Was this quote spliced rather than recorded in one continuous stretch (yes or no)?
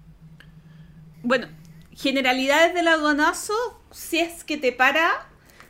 yes